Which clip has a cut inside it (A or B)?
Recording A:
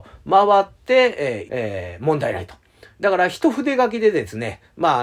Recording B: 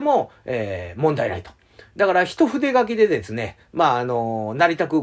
A